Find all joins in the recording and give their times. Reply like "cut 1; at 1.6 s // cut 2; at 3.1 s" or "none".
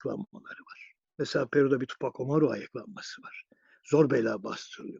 none